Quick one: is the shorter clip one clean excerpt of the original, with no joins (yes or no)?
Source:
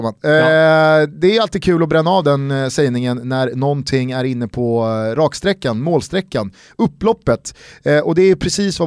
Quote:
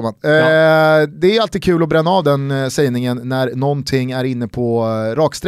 yes